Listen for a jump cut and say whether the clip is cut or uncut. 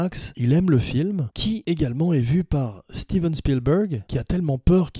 uncut